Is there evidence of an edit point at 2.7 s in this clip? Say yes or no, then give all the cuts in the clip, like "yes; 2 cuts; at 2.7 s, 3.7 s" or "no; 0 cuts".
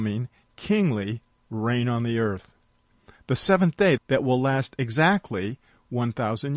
no; 1 cut; at 4.0 s